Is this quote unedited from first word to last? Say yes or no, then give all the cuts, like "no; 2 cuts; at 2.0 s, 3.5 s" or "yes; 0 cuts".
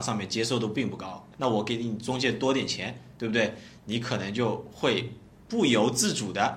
no; 1 cut; at 1.3 s